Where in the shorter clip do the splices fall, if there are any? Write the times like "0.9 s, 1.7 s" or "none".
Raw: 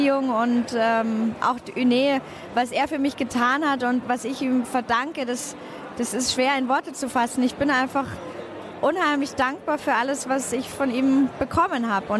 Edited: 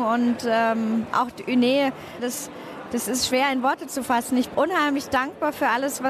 2.2 s, 4.5 s